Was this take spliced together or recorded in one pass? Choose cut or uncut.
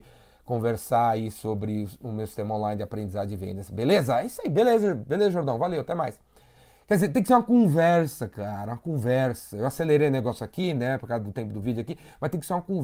uncut